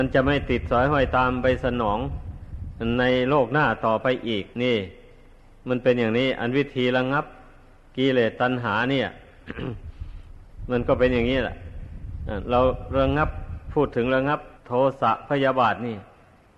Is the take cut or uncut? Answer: cut